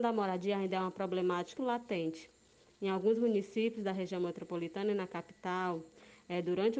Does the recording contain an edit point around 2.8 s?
no; 1 cut; at 1.6 s

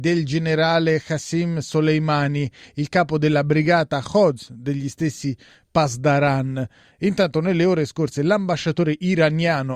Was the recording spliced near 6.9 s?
yes; 1 cut; at 6.9 s

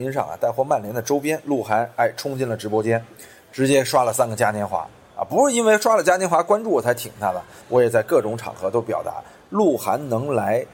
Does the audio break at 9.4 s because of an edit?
no; 2 cuts; at 5.2 s, 7.6 s

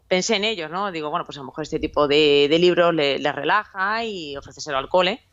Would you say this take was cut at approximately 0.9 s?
no; 0 cuts

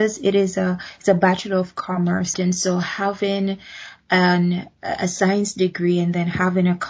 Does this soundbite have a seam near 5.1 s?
no; 1 cut; at 2.3 s

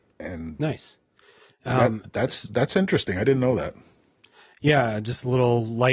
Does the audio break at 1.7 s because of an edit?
no; 0 cuts

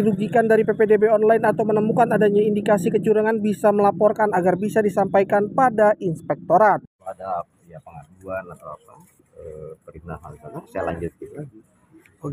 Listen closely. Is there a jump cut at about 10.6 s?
no; 0 cuts

